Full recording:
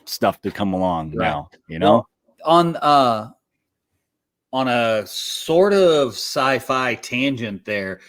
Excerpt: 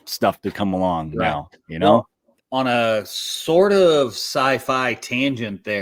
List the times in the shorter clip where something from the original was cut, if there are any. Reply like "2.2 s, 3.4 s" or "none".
2.4 s